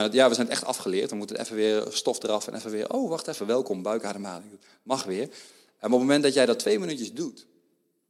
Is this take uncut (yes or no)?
yes